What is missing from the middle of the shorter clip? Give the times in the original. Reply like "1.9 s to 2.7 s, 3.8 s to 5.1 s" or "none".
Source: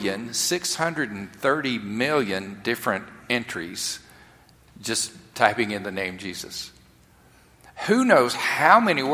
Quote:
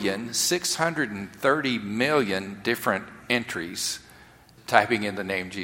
4.6 s to 5.2 s